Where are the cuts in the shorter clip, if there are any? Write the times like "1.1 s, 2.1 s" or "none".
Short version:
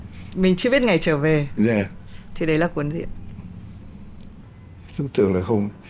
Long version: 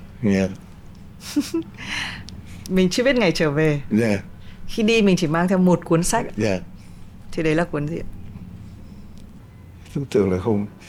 2.3 s